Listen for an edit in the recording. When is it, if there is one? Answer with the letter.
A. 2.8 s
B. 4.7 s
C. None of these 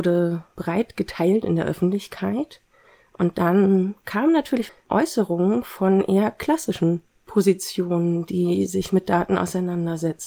B